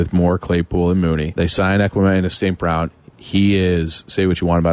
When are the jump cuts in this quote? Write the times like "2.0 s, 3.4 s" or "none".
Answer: 1.3 s